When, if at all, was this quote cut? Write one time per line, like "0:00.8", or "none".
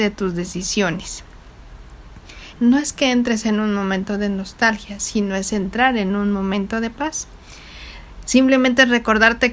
0:02.5